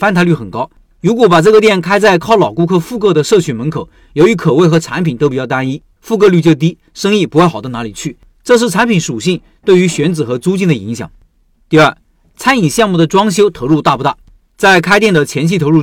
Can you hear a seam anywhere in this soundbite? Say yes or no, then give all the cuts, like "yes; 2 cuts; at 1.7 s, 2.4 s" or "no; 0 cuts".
yes; 1 cut; at 6.0 s